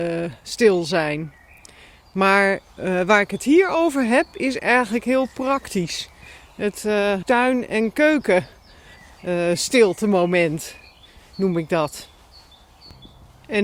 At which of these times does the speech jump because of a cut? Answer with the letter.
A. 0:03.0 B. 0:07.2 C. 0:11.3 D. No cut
B